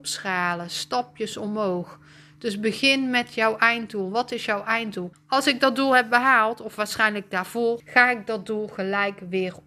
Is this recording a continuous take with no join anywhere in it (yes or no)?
no